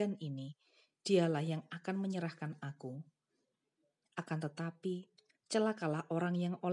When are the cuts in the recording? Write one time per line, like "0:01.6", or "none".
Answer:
0:04.0